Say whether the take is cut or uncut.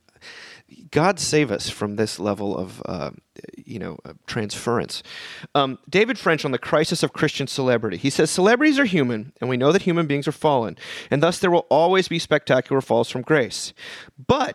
uncut